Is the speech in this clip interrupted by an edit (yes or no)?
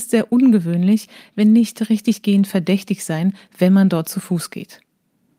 no